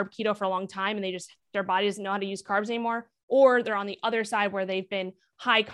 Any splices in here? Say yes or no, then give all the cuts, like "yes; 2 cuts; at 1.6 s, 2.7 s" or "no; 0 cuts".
yes; 1 cut; at 1.4 s